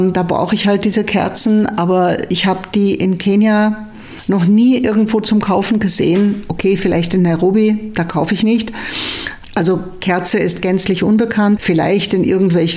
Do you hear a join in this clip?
yes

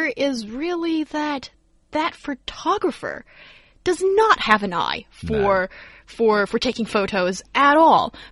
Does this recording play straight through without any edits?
yes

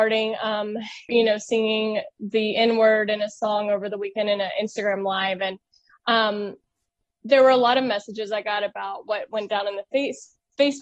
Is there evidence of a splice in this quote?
yes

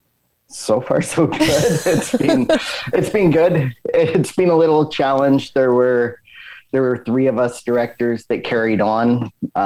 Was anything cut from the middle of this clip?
no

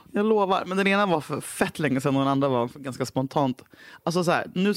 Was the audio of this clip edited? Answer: no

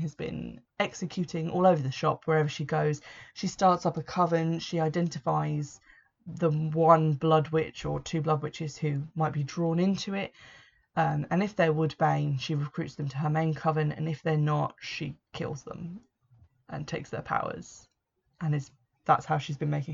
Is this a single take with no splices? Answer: yes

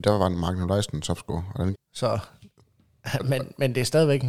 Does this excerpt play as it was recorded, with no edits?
no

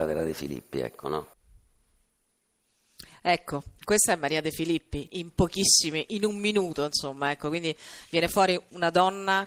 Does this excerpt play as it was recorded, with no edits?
no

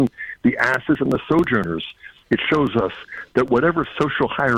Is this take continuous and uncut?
no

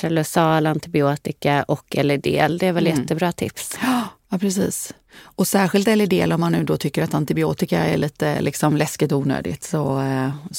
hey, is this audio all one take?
yes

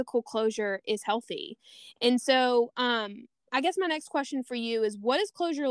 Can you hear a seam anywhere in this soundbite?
no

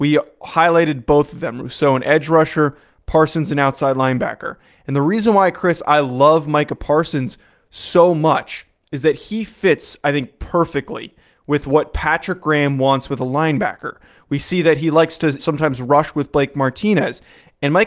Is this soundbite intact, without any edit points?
no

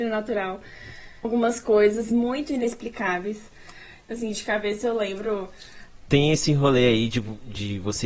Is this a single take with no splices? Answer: no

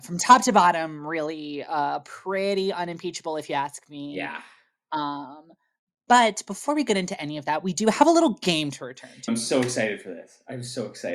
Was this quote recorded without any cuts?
no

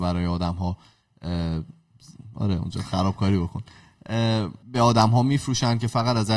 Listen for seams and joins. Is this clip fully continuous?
no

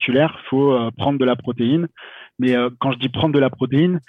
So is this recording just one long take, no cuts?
yes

